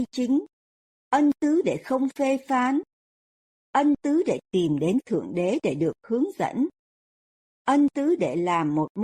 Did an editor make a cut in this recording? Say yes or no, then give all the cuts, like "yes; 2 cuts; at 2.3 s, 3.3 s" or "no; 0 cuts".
no; 0 cuts